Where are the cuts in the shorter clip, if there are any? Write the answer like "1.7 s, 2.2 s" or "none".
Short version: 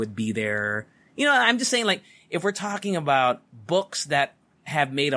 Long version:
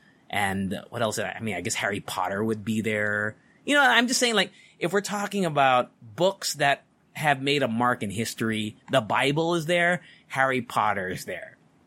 none